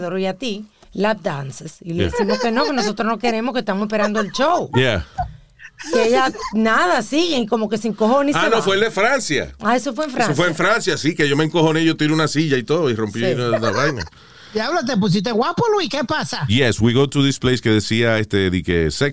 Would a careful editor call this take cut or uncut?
uncut